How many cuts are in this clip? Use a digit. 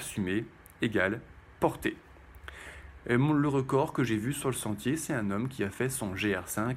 1